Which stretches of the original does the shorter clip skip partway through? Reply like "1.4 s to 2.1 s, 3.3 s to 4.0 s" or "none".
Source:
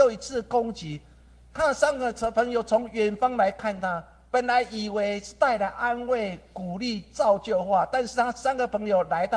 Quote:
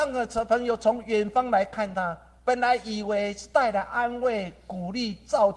none